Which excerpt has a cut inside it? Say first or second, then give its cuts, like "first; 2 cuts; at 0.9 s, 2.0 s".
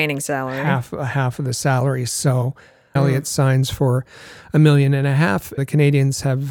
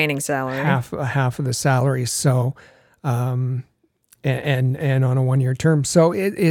first; 2 cuts; at 3.0 s, 5.6 s